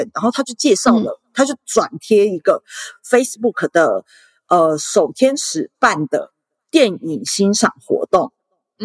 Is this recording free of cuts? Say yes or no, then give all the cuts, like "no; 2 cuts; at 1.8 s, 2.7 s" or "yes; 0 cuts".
yes; 0 cuts